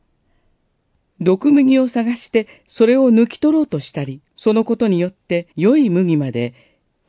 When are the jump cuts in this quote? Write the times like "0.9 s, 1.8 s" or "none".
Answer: 1.0 s, 4.3 s, 5.5 s